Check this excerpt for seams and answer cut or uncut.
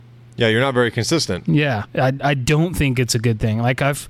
cut